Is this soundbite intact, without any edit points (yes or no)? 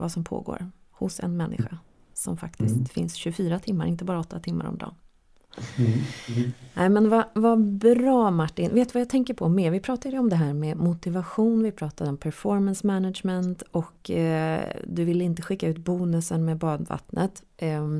yes